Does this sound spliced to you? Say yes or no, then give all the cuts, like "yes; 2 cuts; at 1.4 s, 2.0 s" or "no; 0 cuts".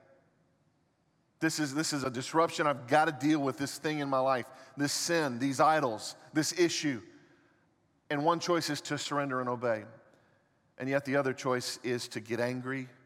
no; 0 cuts